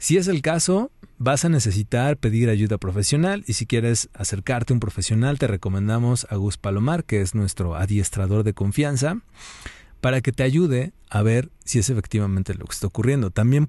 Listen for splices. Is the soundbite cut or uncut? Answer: uncut